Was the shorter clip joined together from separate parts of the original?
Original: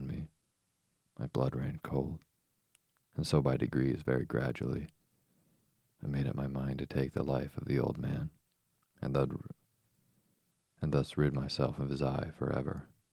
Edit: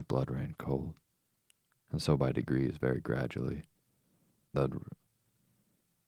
yes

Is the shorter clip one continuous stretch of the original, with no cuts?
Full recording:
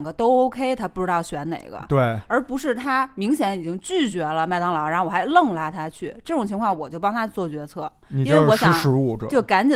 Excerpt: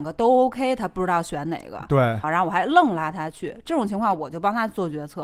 no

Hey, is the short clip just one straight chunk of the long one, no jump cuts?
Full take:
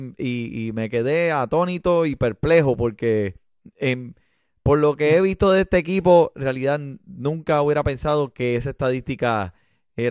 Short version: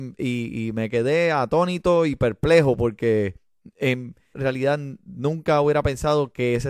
no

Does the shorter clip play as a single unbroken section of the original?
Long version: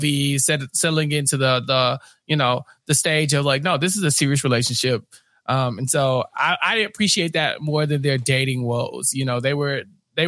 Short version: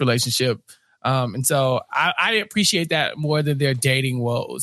yes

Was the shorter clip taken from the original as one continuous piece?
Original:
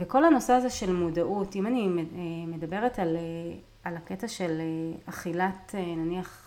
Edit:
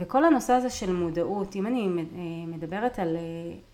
yes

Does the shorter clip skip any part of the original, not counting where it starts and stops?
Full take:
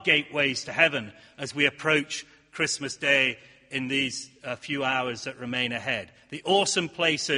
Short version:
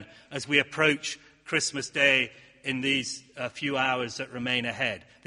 no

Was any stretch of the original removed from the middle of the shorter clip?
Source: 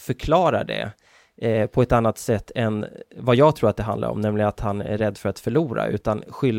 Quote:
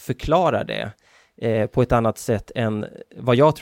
no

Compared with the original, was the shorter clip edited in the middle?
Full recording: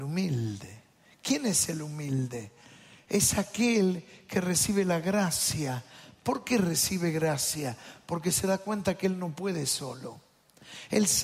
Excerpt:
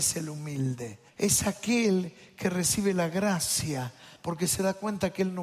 yes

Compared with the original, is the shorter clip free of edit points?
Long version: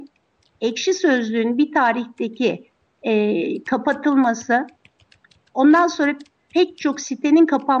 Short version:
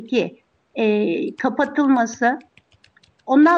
yes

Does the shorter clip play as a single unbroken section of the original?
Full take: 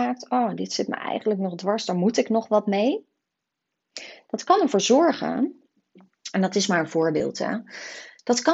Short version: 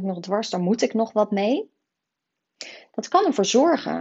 yes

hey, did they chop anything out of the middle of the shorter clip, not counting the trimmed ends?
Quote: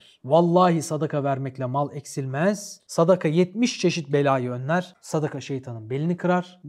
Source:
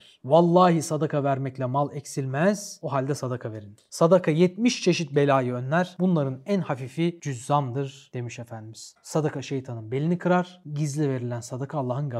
yes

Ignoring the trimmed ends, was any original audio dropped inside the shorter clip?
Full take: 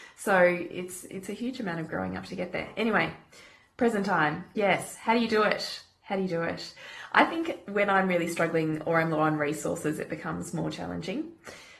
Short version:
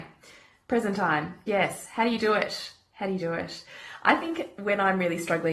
no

